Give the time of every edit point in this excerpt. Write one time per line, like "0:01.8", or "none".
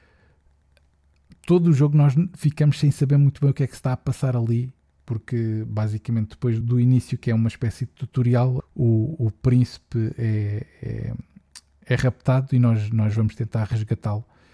0:06.6
0:08.6